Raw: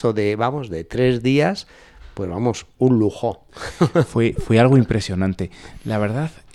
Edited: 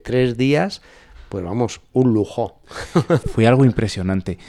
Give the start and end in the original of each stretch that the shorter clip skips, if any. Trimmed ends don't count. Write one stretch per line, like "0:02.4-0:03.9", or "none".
0:04.1-0:04.3